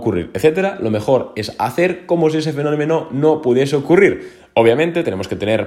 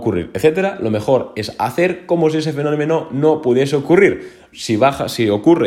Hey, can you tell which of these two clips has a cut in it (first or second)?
second